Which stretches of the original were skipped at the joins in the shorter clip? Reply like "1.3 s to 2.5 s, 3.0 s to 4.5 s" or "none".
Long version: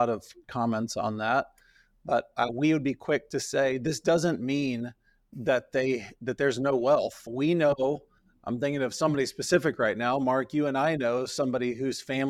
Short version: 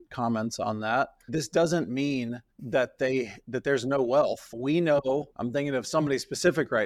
1.7 s to 3.8 s, 5.0 s to 5.2 s, 8.0 s to 8.4 s

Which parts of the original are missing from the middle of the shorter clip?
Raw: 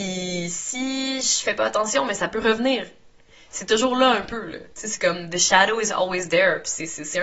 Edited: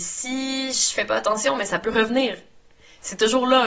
none

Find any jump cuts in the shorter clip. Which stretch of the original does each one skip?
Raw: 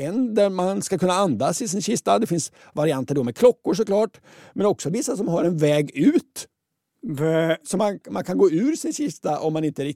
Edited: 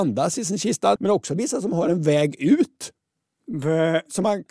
2.2 s to 4.5 s

